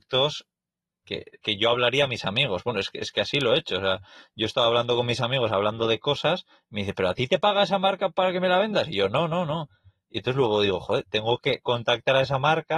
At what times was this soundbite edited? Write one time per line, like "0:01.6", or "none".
0:01.4